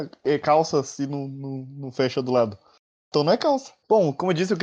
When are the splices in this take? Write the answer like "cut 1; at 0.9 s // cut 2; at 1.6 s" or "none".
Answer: none